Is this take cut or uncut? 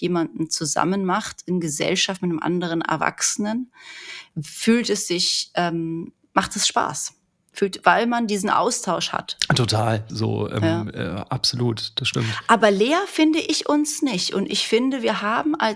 cut